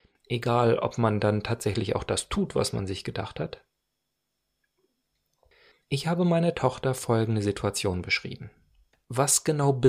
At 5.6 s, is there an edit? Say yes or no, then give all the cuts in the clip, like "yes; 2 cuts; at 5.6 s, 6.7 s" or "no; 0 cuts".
no; 1 cut; at 8.9 s